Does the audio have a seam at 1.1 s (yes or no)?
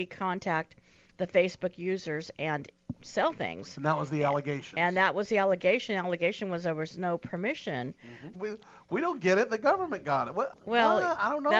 no